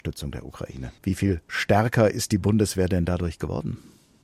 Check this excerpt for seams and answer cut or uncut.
cut